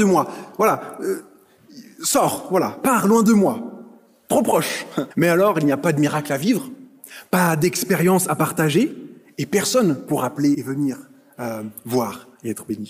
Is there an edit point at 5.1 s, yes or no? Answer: yes